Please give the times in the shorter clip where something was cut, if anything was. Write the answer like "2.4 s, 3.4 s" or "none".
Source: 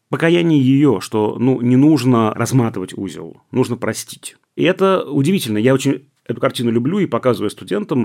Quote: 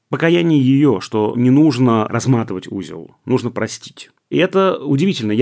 1.3 s